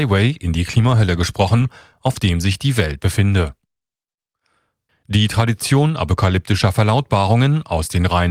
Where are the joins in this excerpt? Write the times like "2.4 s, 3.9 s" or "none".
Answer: 4.9 s